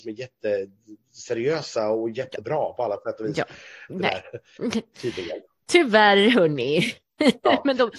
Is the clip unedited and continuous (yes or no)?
no